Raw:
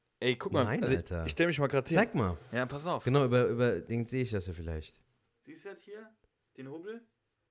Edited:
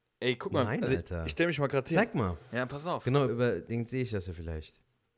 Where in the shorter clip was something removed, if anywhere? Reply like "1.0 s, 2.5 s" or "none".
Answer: 3.3 s